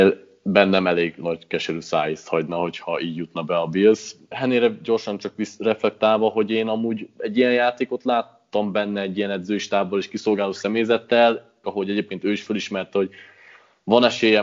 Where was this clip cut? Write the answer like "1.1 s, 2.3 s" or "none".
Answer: 4.3 s, 11.6 s